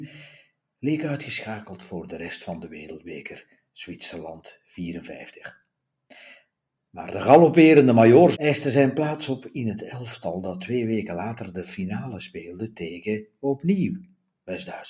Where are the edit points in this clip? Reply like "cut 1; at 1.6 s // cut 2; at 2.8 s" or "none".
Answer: cut 1; at 8.3 s